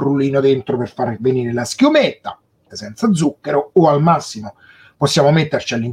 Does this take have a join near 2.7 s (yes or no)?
yes